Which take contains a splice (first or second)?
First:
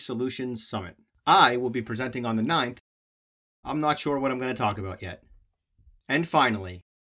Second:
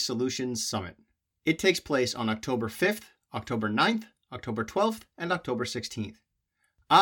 first